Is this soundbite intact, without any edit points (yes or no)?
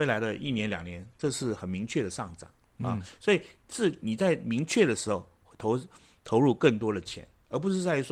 yes